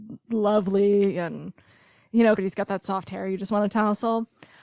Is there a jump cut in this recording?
yes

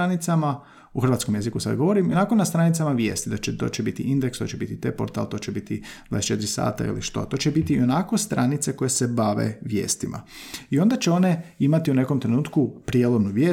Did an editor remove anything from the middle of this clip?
no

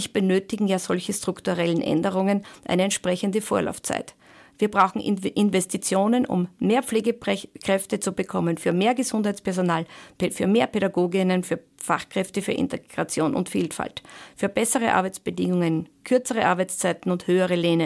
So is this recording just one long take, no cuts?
yes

